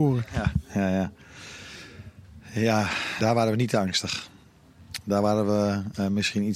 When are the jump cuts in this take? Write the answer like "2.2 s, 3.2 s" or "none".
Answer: 3.2 s